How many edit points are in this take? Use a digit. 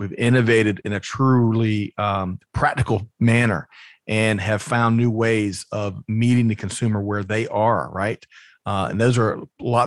0